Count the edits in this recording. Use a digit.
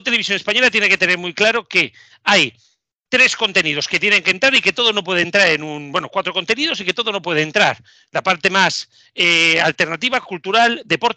0